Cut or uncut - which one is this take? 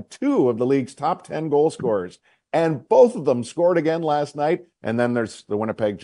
cut